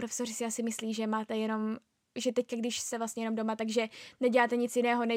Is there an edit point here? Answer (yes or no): no